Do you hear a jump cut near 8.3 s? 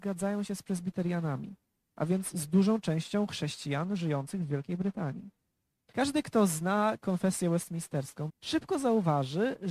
yes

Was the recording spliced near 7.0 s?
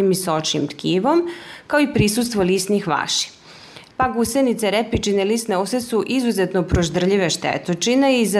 no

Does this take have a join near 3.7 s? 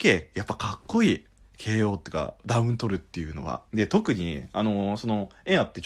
yes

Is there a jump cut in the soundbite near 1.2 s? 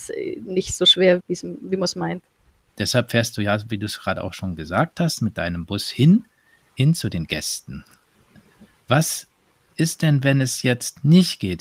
yes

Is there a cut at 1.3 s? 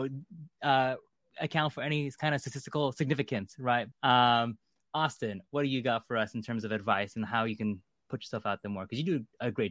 no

